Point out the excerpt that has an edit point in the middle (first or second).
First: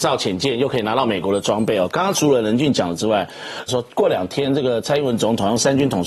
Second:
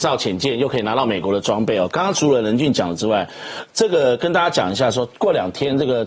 first